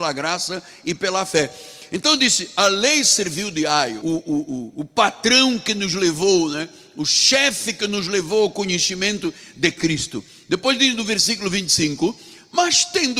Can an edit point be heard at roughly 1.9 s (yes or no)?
no